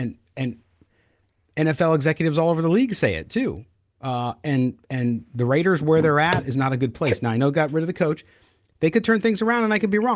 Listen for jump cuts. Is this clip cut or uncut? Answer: uncut